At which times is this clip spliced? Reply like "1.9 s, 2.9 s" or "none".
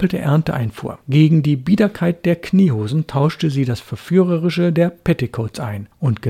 1.0 s